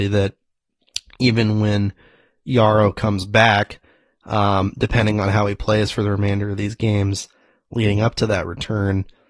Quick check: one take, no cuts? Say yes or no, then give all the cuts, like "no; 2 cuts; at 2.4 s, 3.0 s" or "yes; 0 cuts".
yes; 0 cuts